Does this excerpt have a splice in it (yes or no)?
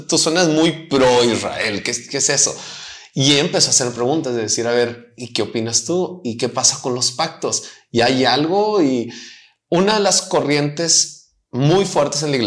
no